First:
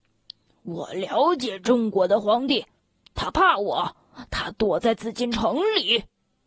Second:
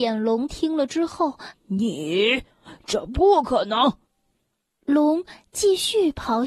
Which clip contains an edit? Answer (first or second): second